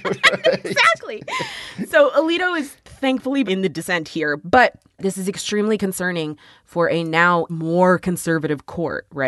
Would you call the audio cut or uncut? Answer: cut